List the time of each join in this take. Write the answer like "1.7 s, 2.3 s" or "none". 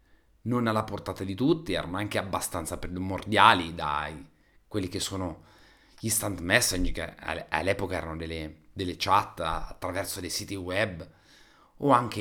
none